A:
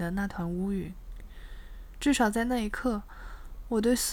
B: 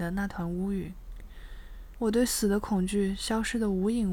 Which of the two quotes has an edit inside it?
B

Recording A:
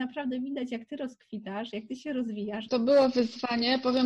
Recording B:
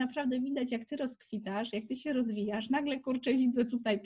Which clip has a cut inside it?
A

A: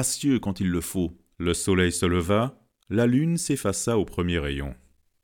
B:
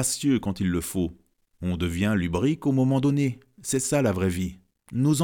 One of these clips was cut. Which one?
A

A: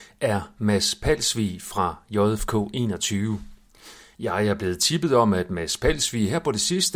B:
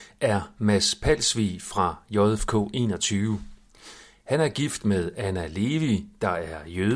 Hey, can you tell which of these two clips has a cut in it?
A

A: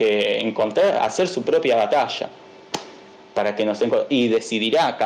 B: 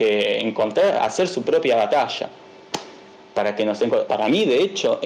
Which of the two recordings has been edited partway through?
B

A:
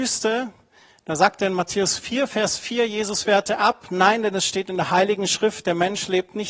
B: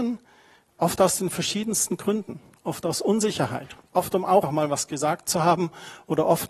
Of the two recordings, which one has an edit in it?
B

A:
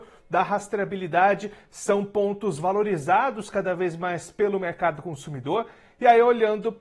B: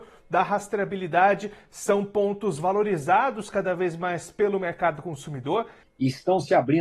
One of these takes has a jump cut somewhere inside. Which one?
B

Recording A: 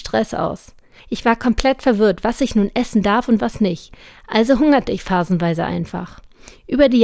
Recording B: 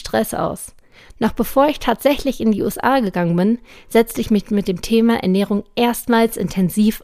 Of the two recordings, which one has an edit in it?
A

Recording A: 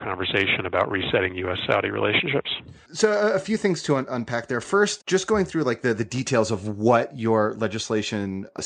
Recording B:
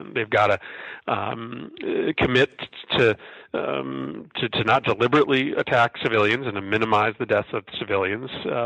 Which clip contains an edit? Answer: A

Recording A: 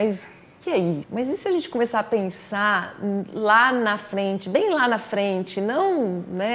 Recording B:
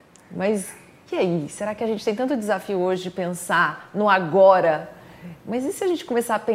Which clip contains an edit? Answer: A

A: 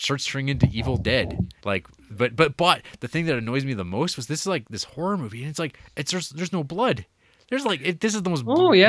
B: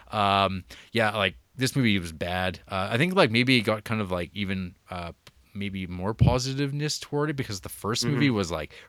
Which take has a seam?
A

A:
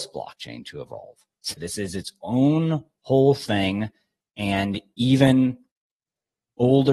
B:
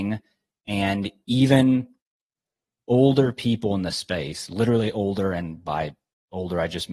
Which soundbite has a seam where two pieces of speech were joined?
A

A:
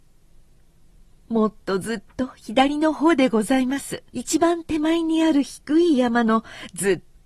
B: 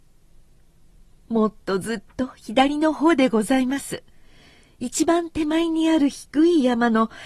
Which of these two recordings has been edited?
A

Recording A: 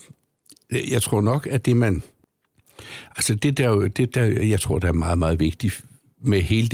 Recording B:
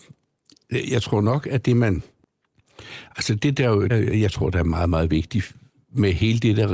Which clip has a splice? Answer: B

